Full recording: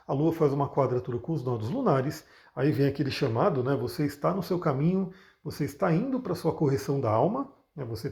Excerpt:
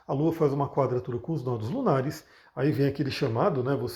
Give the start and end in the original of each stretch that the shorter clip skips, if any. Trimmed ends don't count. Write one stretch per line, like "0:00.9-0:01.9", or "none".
none